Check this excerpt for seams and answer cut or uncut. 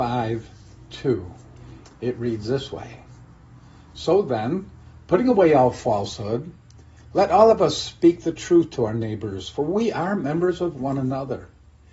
cut